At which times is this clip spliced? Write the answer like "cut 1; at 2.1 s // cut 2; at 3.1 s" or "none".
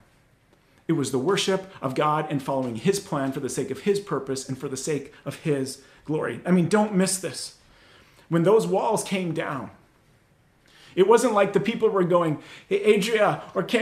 none